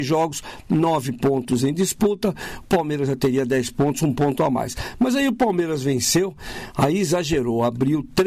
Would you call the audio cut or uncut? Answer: uncut